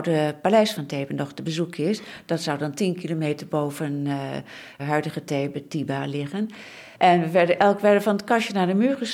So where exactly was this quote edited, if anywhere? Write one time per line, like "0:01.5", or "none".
0:04.8
0:06.9